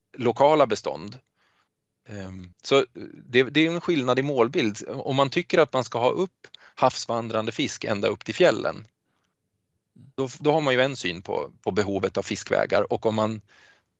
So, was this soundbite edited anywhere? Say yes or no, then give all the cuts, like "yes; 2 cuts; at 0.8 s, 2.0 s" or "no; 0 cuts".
yes; 1 cut; at 2.5 s